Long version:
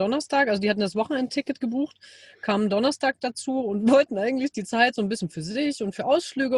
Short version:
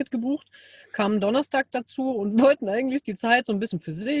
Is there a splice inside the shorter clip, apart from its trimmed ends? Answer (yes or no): no